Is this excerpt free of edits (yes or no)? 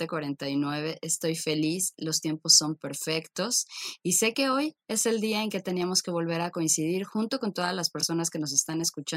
yes